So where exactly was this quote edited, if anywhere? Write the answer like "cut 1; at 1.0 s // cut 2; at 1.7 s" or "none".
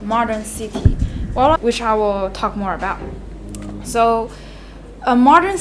cut 1; at 1.6 s